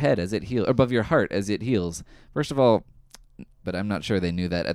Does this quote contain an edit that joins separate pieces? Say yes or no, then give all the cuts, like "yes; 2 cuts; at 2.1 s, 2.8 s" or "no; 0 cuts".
yes; 1 cut; at 3.6 s